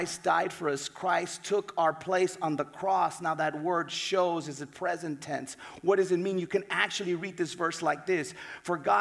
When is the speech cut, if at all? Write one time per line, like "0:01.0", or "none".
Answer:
none